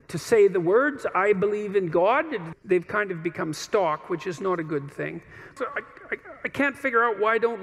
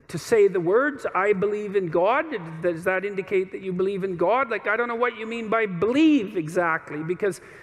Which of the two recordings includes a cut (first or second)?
first